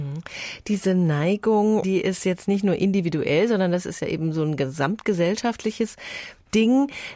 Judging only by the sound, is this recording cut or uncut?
cut